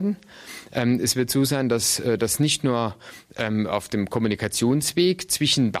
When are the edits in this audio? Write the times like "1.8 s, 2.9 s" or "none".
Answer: none